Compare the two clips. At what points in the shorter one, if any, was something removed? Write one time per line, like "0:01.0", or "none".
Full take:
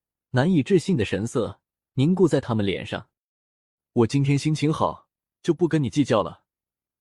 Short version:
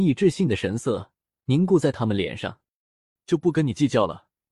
0:03.2